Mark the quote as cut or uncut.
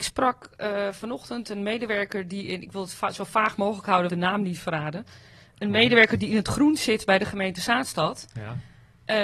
cut